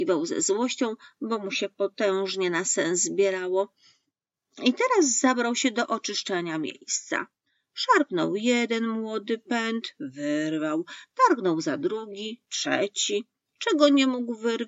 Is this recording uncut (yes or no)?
yes